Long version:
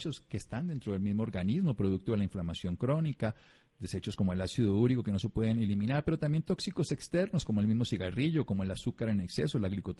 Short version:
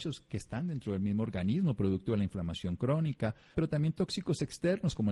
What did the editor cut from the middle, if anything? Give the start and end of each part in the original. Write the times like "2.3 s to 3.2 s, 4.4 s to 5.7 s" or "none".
3.5 s to 6.0 s